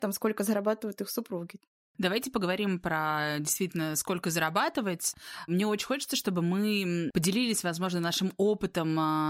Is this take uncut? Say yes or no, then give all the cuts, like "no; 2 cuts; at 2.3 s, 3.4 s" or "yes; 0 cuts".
yes; 0 cuts